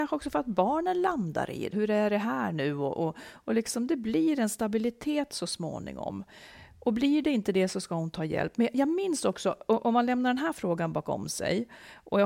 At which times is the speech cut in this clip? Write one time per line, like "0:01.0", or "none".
0:01.7